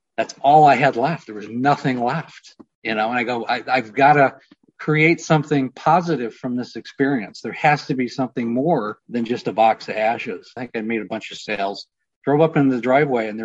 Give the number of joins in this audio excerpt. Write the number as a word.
two